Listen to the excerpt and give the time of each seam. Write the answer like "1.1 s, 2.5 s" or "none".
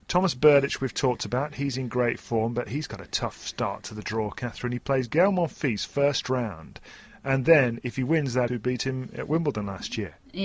8.5 s